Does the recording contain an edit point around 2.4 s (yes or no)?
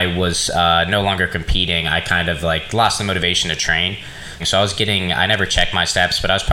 no